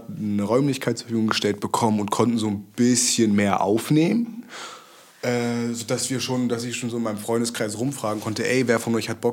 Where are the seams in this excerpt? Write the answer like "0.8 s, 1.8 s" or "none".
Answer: none